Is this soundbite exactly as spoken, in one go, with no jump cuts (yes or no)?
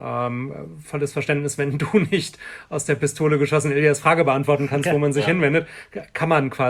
yes